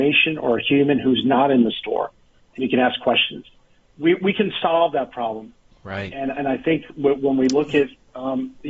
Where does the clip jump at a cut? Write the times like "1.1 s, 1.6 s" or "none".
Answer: 5.7 s